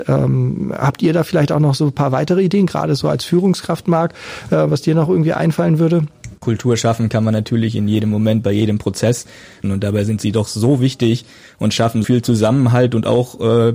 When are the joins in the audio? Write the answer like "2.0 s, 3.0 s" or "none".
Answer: 6.4 s, 9.6 s, 12.0 s